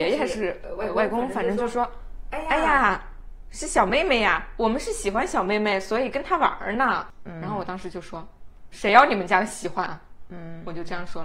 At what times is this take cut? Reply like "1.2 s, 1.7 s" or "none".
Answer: none